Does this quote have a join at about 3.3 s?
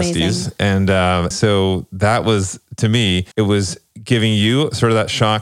yes; 2 cuts; at 1.3 s, 3.3 s

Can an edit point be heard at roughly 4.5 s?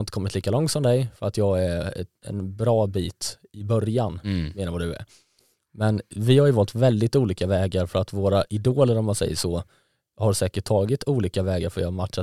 no; 0 cuts

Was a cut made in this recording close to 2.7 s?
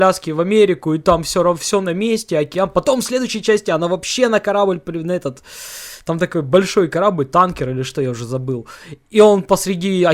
no; 0 cuts

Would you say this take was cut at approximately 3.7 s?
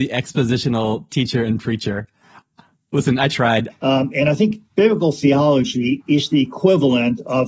yes; 2 cuts; at 3.7 s, 6.0 s

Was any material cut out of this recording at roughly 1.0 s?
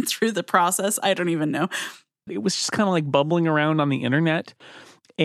no; 1 cut; at 2.3 s

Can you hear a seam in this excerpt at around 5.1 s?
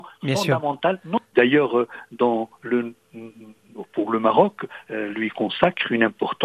yes; 2 cuts; at 1.3 s, 5.1 s

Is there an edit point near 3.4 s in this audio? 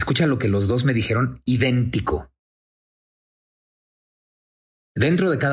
no; 0 cuts

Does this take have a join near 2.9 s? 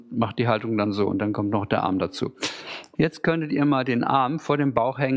yes; 1 cut; at 2.9 s

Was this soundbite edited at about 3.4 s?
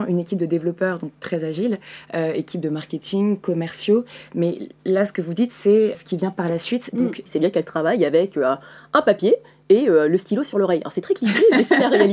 no; 2 cuts; at 5.9 s, 7.3 s

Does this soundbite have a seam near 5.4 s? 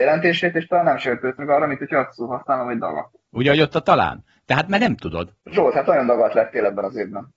yes; 2 cuts; at 3.2 s, 5.4 s

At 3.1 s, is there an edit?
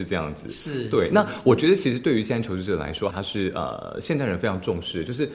yes; 1 cut; at 3.1 s

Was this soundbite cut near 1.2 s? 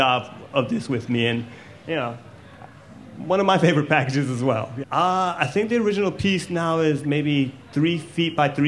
no; 1 cut; at 4.8 s

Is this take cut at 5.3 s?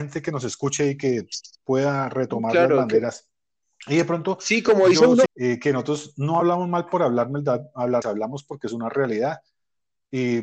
yes; 2 cuts; at 5.3 s, 8.0 s

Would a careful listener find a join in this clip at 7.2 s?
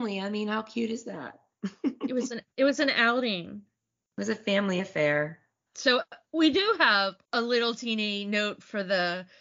yes; 2 cuts; at 5.7 s, 7.2 s

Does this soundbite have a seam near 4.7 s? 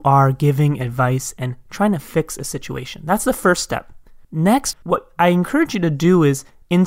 yes; 1 cut; at 4.7 s

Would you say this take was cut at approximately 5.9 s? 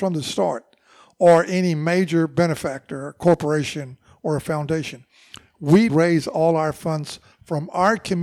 yes; 1 cut; at 5.9 s

